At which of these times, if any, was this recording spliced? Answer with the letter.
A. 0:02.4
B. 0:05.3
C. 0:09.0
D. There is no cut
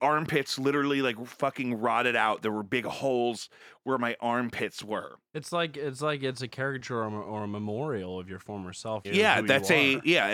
C